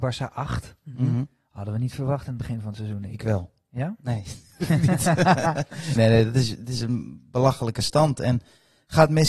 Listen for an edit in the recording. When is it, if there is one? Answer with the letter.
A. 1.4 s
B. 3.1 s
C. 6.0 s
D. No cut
C